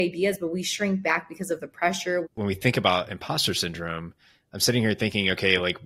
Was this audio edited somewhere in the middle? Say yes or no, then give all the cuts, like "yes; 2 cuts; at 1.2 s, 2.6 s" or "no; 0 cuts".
yes; 1 cut; at 2.2 s